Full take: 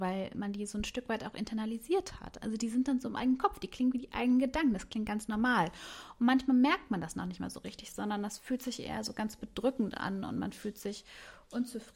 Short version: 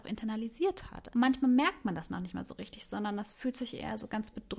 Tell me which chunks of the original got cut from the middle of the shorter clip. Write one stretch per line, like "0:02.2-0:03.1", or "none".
0:02.4-0:06.2